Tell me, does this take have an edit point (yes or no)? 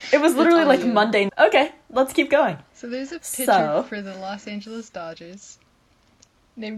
yes